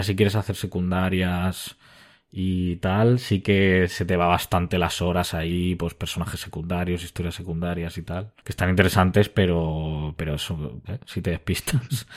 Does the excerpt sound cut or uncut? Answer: cut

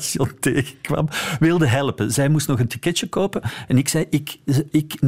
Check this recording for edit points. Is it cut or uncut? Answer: cut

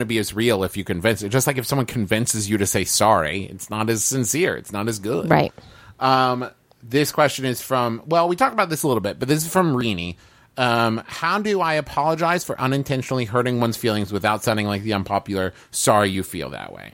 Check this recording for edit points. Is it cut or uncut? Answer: uncut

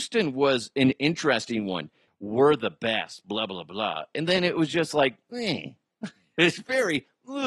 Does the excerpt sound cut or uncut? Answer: cut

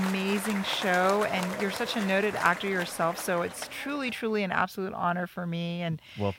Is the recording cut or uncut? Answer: uncut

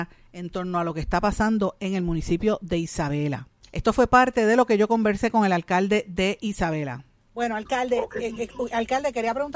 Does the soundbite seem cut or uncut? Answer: uncut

